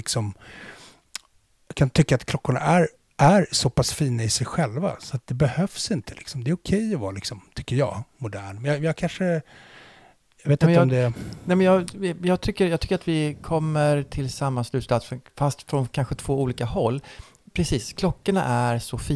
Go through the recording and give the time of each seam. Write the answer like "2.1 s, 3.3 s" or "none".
none